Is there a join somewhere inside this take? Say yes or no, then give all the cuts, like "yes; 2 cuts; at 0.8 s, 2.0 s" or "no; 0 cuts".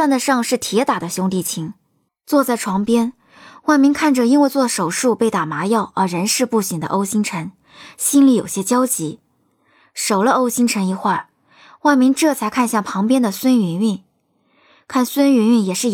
yes; 1 cut; at 2.1 s